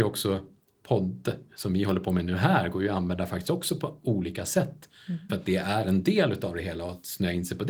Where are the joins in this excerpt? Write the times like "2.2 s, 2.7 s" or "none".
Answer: 5.3 s